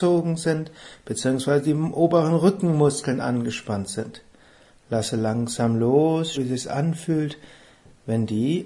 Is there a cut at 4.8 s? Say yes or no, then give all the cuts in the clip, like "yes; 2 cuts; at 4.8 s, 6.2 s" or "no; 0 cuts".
no; 1 cut; at 6.3 s